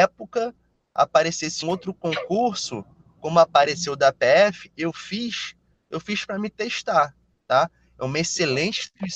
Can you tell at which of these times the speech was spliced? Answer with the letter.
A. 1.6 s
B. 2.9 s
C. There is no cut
A